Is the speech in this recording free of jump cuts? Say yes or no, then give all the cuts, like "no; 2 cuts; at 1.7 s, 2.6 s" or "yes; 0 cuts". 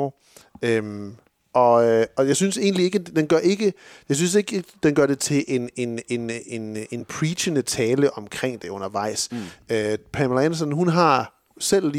yes; 0 cuts